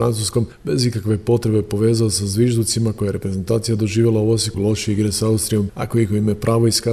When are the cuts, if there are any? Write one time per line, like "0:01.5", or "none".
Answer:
0:04.5
0:05.7